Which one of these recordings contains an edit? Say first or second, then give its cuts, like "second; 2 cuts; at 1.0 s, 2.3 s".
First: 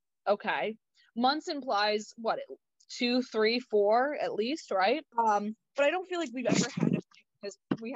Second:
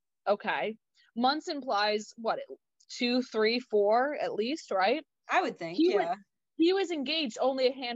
first; 1 cut; at 5.1 s